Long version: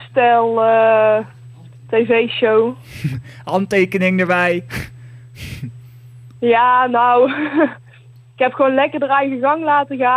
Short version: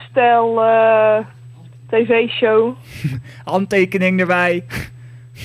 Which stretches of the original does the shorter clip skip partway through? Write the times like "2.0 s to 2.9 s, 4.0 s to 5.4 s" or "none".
none